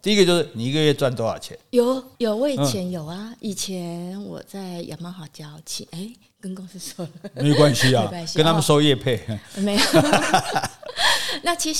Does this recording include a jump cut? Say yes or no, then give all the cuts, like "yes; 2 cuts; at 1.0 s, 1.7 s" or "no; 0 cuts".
yes; 1 cut; at 2.2 s